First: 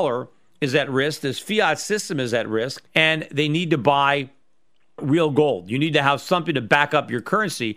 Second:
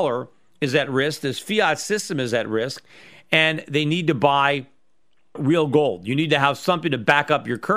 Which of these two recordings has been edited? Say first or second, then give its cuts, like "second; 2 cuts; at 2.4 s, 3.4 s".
first; 1 cut; at 2.9 s